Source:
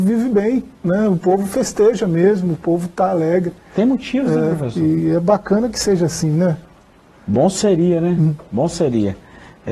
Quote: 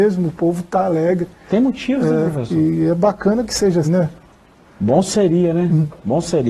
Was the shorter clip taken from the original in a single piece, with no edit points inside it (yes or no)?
no